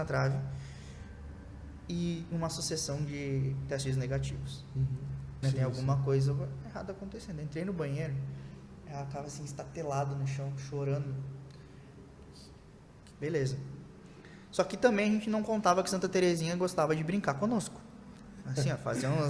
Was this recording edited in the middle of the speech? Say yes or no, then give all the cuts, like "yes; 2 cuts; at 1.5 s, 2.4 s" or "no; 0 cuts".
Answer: yes; 2 cuts; at 5.4 s, 13.1 s